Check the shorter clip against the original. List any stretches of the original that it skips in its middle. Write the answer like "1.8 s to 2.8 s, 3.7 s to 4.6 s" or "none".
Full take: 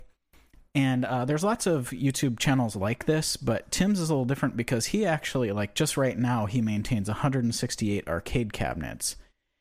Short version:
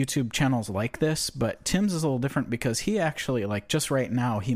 none